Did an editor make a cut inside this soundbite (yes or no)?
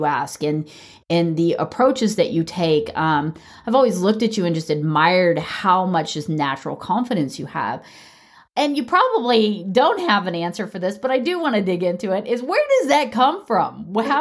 no